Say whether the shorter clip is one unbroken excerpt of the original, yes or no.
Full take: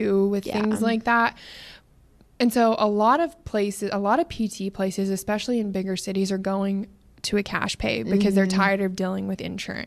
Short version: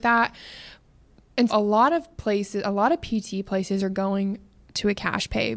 no